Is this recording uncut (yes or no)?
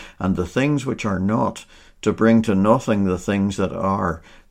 yes